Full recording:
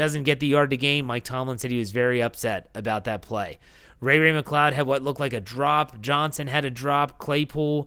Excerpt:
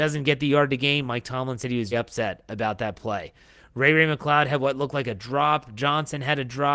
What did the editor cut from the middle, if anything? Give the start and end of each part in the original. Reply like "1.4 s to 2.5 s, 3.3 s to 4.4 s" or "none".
1.9 s to 2.2 s

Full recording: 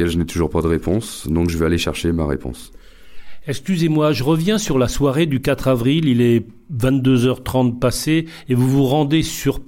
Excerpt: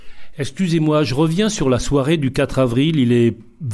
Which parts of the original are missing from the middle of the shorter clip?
none

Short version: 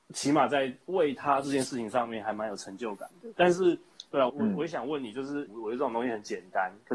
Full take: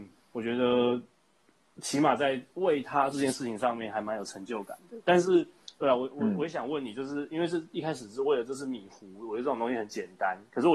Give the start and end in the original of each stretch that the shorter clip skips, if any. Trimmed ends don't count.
6.0 s to 6.1 s, 7.3 s to 9.1 s

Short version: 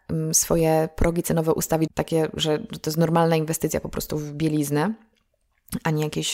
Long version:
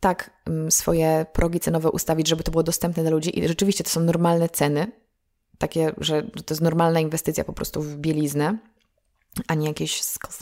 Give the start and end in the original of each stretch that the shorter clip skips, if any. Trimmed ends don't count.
2.2 s to 5.5 s

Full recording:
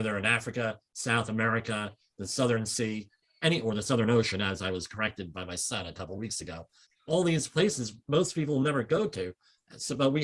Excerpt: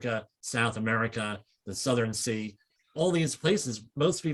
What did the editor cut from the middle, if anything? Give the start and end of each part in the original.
3.3 s to 6.9 s

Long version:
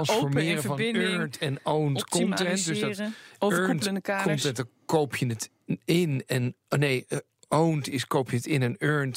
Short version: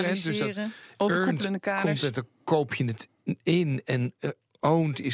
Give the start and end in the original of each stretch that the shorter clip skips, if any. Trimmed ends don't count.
6.6 s to 7.1 s

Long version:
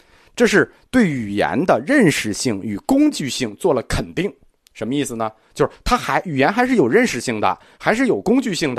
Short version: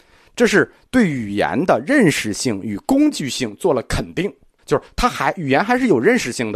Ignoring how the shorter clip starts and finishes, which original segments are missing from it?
4.6 s to 5.5 s

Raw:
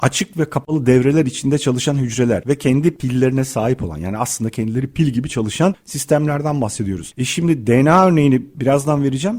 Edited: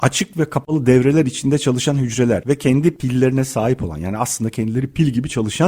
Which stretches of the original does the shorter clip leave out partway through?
none

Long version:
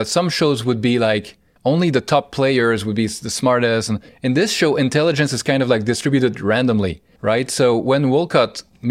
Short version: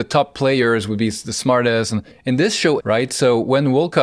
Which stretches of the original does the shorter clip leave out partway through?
4.7 s to 7.1 s

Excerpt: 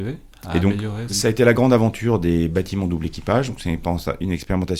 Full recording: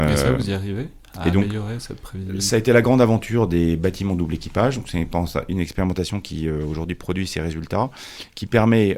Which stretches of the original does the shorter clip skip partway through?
1.8 s to 2.4 s

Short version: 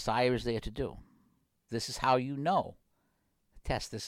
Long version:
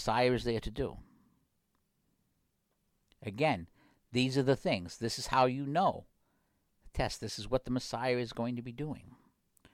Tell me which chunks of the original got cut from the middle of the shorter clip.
1.7 s to 5.0 s

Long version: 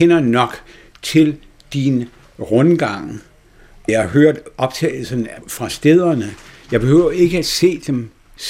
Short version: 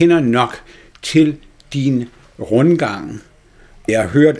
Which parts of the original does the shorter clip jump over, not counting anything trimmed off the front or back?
none

